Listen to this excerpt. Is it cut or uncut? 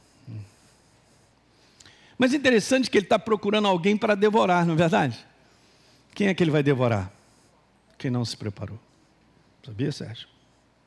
uncut